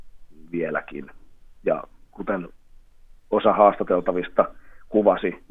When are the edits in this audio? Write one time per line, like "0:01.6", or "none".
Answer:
none